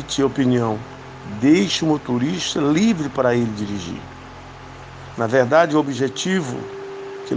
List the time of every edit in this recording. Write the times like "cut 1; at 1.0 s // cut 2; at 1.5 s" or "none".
cut 1; at 5.1 s

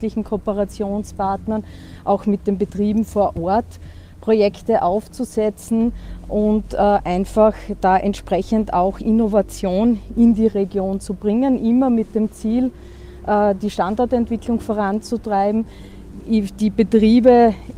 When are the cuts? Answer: none

